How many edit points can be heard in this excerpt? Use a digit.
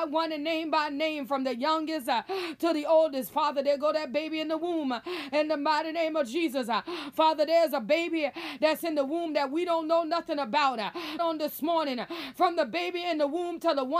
1